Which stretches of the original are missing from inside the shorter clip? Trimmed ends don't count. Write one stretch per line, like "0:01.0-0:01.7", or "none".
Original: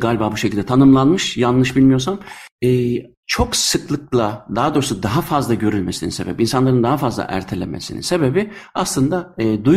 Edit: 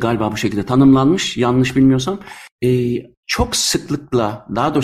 none